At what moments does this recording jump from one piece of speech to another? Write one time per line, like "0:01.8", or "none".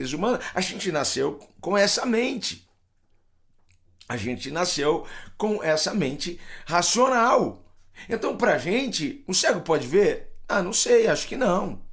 none